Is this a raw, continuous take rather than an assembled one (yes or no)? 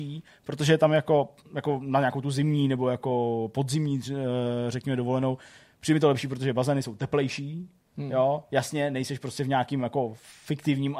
yes